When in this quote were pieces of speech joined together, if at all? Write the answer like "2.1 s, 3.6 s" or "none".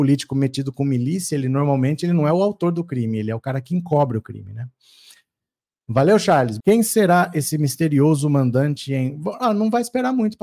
6.6 s